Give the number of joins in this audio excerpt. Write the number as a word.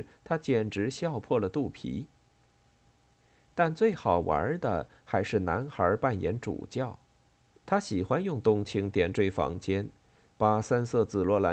one